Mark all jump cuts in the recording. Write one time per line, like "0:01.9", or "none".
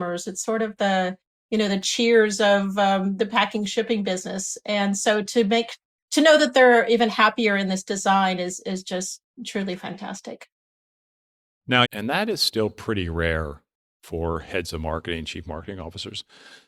0:11.8